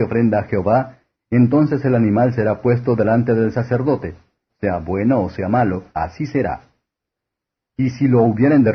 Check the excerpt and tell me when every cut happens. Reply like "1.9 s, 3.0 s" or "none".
4.5 s, 5.9 s